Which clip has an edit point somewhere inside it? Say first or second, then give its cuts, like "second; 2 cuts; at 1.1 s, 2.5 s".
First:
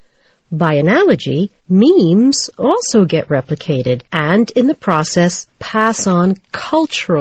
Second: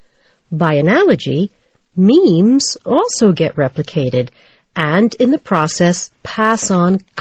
first; 2 cuts; at 1.6 s, 4.1 s